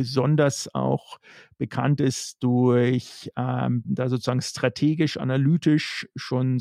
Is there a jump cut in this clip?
yes; 1 cut; at 3.8 s

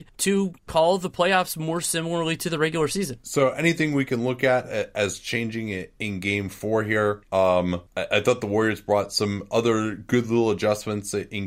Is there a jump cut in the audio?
no; 0 cuts

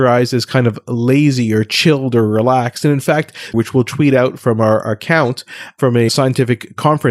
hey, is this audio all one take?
no; 1 cut; at 3.5 s

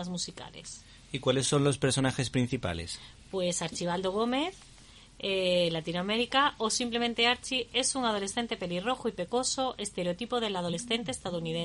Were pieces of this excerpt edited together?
no; 0 cuts

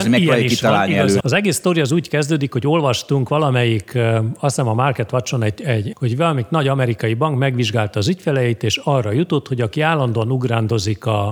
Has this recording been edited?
yes; 2 cuts; at 1.2 s, 5.9 s

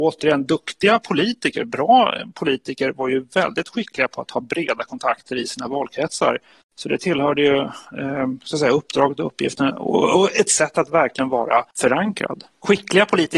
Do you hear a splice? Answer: yes; 1 cut; at 11.7 s

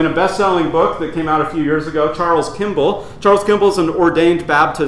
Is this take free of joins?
yes; 0 cuts

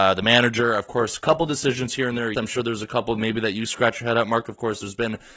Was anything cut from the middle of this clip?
yes; 1 cut; at 2.3 s

